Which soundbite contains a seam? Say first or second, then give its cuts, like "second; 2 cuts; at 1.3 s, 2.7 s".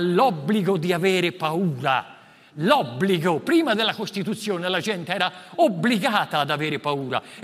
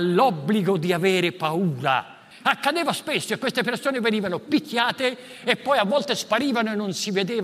second; 1 cut; at 2.3 s